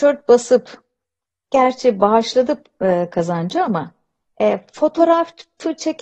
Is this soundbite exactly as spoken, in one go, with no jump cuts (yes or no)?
yes